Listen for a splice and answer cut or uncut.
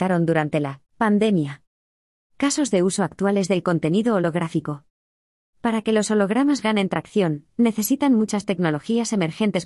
uncut